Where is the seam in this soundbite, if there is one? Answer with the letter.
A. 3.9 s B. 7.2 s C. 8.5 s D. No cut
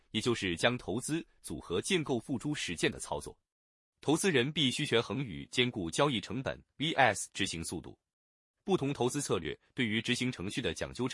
D